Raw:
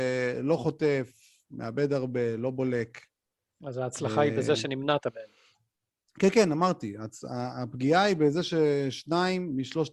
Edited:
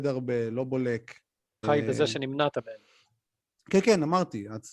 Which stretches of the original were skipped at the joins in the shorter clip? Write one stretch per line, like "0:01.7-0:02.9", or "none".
0:03.5-0:04.1